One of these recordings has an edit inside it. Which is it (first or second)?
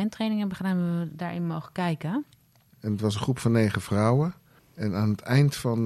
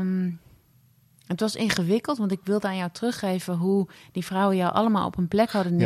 first